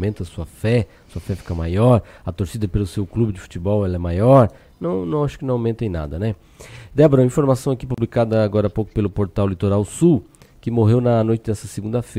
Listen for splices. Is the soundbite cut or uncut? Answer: uncut